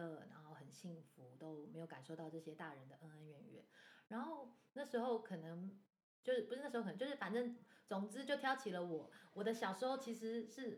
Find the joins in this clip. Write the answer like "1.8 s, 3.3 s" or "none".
none